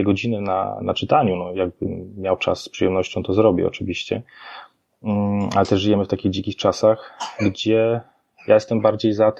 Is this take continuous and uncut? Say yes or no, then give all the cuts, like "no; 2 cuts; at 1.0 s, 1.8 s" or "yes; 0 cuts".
yes; 0 cuts